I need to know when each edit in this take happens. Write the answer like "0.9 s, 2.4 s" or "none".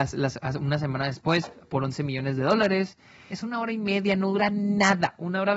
3.3 s